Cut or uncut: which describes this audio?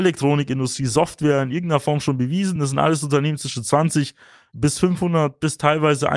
uncut